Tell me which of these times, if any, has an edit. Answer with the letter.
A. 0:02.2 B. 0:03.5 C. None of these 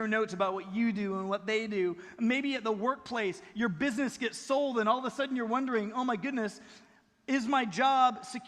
C